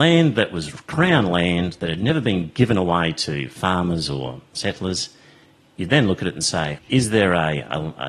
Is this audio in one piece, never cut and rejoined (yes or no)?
no